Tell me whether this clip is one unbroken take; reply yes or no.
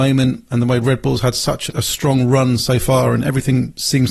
no